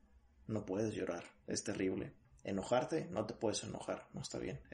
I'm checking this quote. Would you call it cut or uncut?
uncut